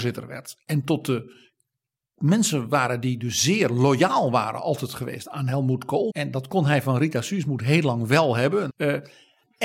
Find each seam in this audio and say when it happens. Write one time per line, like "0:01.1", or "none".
0:06.1
0:08.7